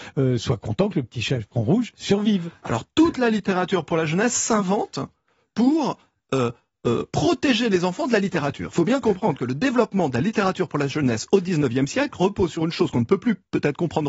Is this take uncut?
yes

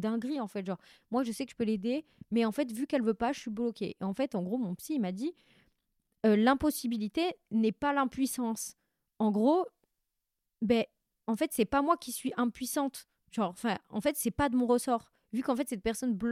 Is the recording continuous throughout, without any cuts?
yes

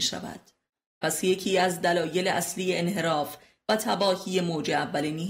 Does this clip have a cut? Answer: yes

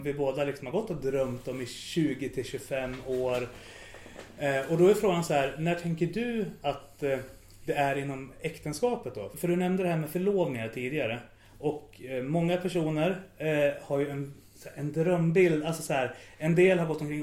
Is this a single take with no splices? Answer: no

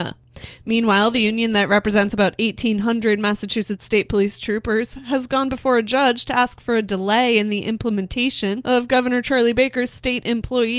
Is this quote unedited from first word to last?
yes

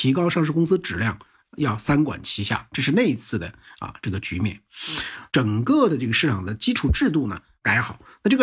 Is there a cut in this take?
yes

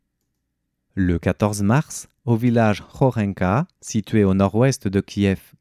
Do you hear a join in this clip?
no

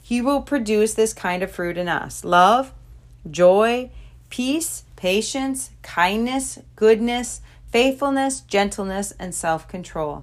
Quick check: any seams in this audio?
yes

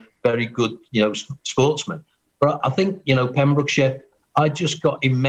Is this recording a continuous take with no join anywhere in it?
no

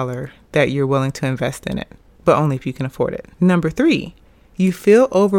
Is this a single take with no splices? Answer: no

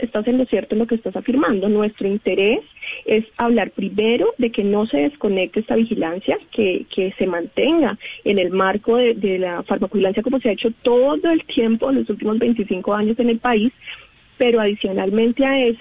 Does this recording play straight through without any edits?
yes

